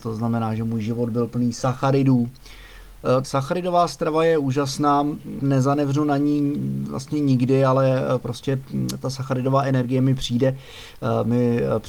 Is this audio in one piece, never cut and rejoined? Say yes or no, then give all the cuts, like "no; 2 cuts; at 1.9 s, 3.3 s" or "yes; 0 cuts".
no; 2 cuts; at 3.2 s, 5.4 s